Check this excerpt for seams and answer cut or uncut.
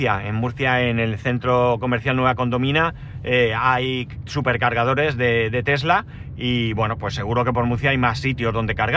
uncut